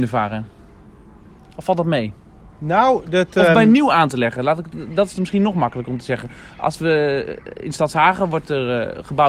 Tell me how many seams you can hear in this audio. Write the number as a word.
zero